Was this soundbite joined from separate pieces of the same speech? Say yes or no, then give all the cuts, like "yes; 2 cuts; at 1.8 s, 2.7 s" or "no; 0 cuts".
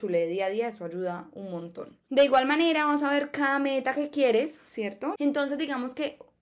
yes; 1 cut; at 5.2 s